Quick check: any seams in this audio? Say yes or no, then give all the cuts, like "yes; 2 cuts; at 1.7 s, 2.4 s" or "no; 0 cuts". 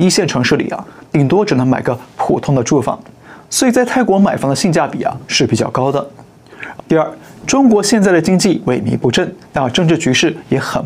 yes; 1 cut; at 6.8 s